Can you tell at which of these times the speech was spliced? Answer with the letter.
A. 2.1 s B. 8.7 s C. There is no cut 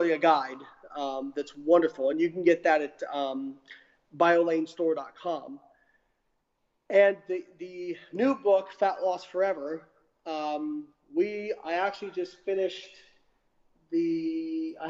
C